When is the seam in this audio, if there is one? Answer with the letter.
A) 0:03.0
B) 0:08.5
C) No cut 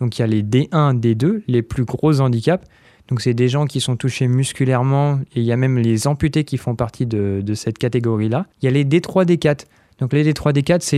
B